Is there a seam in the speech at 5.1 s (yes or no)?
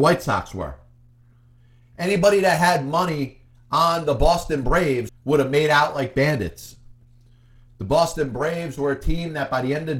yes